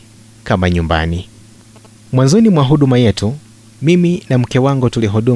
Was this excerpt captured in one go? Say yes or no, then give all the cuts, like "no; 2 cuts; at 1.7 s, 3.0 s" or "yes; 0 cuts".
yes; 0 cuts